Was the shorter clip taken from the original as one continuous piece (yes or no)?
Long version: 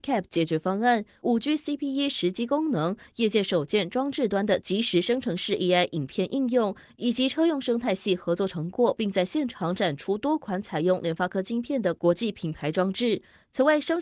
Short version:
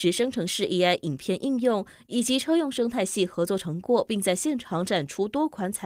yes